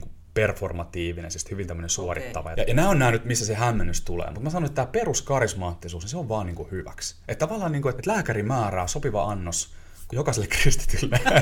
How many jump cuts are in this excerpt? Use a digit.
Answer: 3